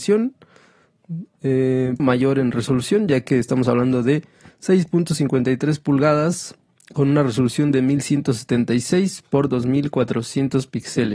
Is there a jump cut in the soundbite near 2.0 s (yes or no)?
yes